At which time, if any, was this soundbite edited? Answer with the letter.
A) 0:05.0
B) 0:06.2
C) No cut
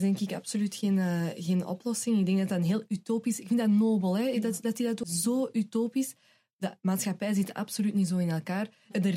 A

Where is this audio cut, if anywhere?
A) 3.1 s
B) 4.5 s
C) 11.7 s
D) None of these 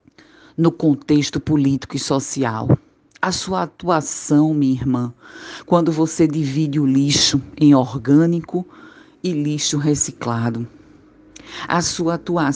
D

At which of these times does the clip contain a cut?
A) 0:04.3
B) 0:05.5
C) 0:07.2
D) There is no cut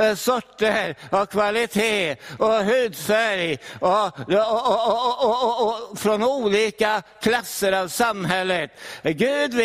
D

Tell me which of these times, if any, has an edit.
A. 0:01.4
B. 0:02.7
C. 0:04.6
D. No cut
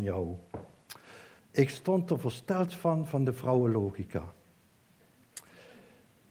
A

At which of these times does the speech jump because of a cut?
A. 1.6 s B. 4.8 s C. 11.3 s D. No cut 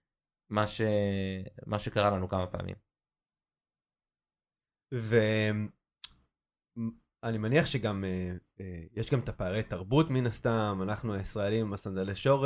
D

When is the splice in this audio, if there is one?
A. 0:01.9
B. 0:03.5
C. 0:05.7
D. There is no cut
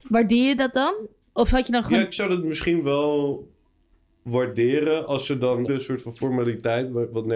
C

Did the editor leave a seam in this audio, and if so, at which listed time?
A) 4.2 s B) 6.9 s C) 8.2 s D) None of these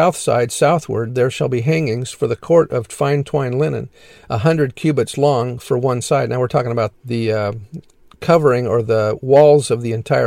B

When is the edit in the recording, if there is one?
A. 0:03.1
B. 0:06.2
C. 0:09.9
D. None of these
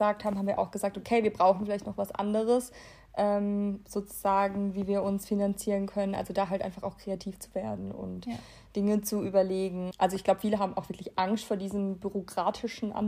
C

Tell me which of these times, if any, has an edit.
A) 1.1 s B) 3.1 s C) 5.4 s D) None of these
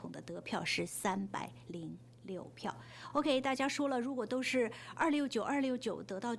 D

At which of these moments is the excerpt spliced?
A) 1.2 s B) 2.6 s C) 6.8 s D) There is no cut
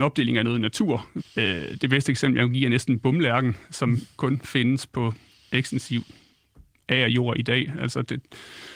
A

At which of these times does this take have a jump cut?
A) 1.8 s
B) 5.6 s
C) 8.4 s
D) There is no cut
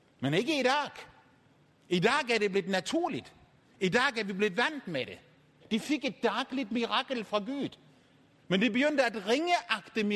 B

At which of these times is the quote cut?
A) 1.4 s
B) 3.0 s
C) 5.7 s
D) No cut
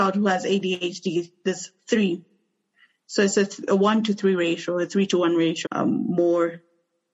C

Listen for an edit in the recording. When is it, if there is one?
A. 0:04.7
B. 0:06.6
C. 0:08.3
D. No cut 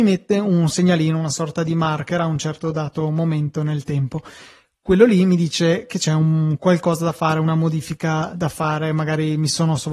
C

